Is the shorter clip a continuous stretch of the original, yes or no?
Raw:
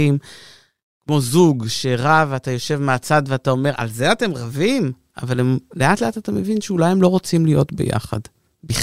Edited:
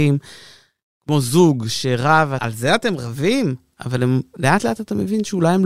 no